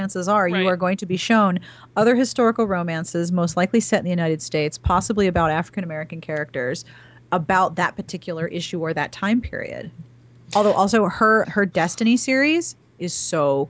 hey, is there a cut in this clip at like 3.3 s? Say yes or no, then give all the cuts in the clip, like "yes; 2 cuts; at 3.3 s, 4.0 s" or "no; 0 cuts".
no; 1 cut; at 11.4 s